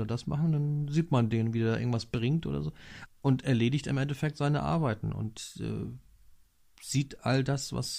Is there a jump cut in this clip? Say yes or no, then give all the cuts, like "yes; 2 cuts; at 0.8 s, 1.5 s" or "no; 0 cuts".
yes; 1 cut; at 3.1 s